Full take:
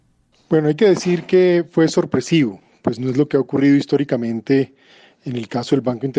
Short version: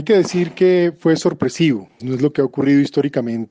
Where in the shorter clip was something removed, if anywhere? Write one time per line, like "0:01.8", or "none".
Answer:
0:02.0